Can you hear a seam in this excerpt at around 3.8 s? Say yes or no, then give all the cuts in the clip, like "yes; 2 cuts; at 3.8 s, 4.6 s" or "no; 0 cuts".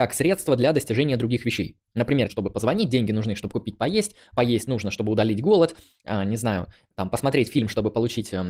no; 1 cut; at 2.3 s